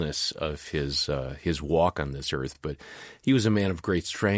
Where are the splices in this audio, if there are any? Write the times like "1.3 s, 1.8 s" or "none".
none